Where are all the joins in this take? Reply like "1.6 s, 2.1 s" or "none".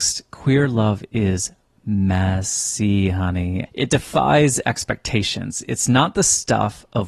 3.7 s